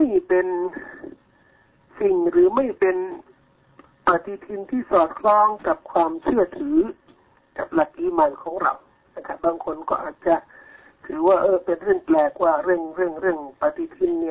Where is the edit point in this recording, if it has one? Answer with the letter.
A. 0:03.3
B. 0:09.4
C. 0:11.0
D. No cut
B